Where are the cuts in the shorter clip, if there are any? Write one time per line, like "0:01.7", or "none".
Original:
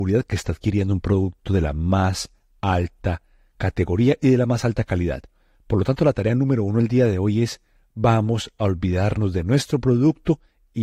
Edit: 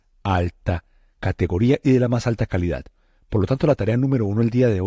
none